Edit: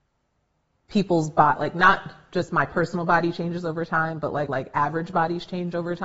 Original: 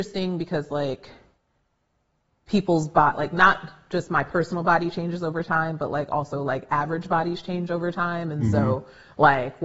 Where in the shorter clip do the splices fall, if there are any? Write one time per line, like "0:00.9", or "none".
0:04.5